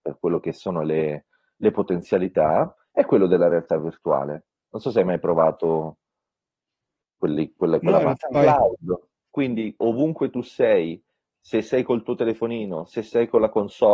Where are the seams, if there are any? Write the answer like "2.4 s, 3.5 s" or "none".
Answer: 8.3 s